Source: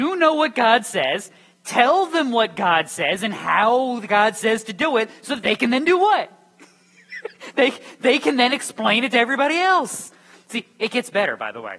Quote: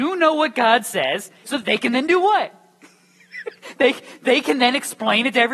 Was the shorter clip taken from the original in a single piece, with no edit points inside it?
no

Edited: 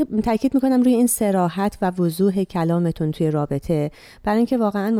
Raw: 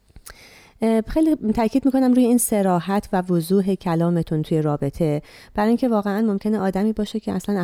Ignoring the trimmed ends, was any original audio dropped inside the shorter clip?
no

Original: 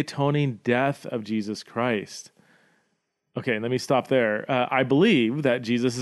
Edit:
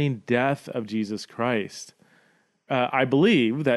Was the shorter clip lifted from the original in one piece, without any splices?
no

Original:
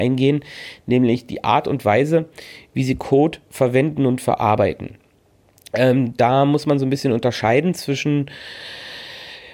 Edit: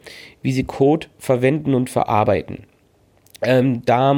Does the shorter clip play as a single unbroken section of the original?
yes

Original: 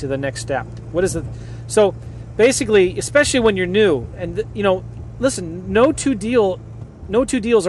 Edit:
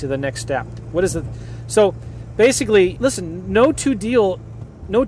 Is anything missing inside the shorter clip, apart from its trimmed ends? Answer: yes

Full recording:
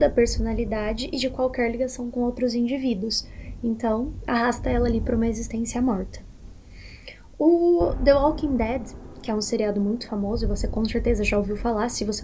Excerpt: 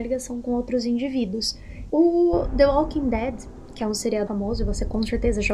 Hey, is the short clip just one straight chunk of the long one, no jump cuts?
no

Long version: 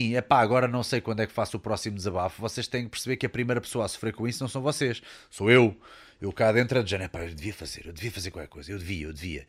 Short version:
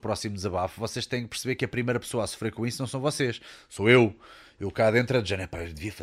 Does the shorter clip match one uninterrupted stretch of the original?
yes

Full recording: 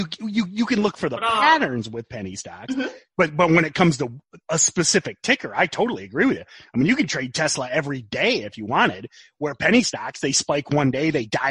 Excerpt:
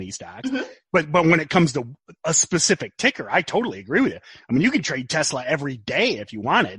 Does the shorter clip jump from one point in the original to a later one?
no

